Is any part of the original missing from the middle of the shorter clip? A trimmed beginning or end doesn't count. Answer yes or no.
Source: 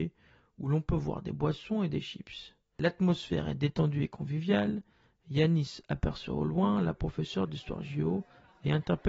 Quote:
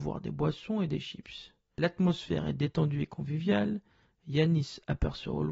no